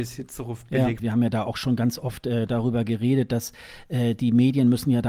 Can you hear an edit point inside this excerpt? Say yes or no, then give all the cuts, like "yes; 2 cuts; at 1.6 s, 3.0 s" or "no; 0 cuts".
yes; 1 cut; at 1.0 s